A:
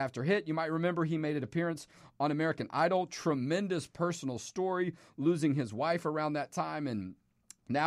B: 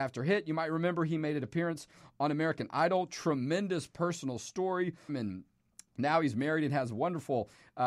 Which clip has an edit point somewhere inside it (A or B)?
B